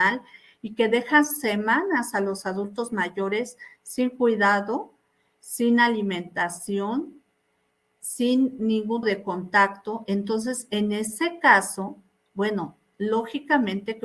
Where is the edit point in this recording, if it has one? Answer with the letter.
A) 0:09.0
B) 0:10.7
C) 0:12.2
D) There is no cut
A